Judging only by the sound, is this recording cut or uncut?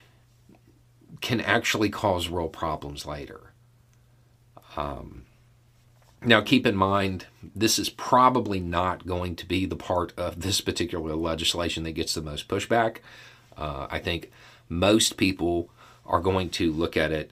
uncut